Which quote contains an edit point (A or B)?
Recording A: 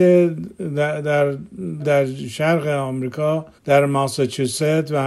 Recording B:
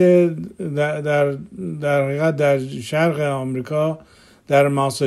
A